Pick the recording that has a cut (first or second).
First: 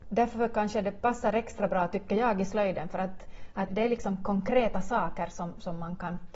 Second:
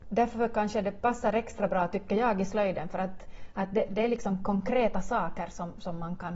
first